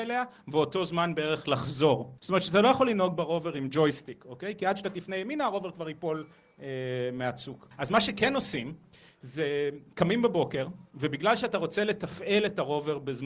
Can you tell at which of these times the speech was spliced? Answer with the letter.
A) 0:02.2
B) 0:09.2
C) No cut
A